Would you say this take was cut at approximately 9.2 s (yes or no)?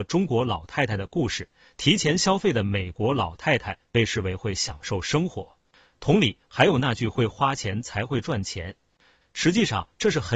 yes